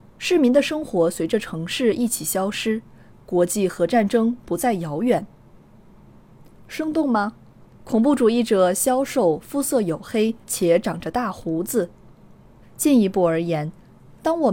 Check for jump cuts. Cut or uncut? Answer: cut